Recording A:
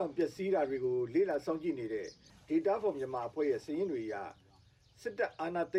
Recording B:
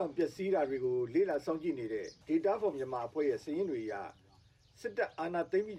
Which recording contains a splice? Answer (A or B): B